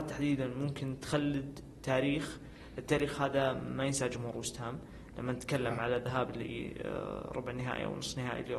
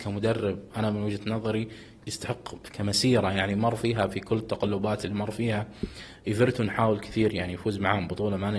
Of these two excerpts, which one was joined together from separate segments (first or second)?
second